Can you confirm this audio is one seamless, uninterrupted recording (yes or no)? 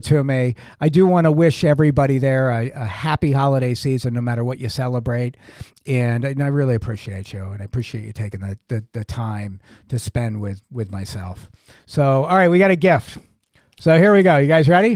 yes